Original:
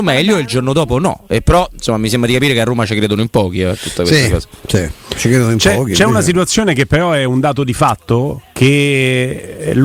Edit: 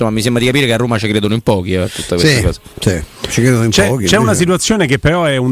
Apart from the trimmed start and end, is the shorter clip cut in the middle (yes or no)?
no